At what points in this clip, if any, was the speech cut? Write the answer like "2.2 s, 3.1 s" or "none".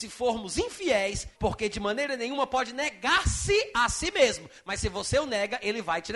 1.4 s